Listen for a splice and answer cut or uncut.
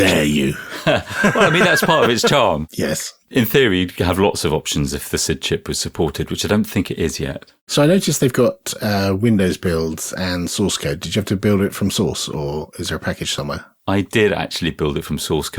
uncut